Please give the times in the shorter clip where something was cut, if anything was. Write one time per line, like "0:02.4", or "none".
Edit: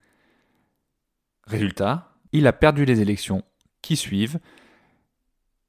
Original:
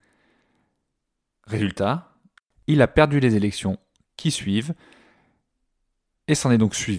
0:02.3